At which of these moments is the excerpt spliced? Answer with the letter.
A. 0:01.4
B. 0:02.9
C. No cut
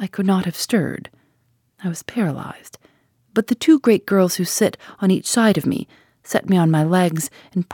C